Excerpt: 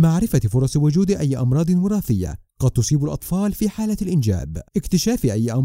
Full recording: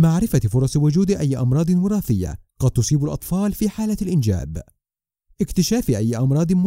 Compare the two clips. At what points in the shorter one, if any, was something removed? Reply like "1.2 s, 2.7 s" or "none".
4.7 s